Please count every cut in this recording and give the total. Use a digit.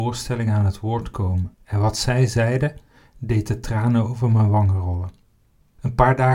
1